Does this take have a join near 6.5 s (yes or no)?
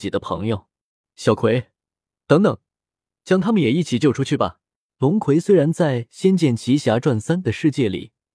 no